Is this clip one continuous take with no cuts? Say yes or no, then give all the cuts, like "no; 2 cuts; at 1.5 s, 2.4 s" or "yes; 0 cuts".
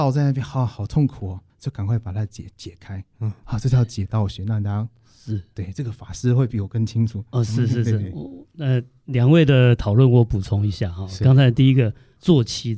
yes; 0 cuts